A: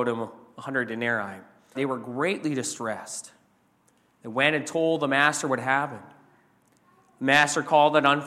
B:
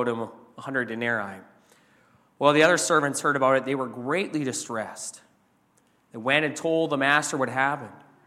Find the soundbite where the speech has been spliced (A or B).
A